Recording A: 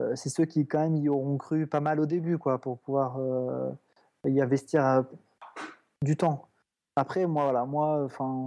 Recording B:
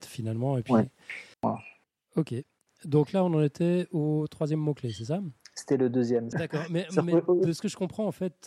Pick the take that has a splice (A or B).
B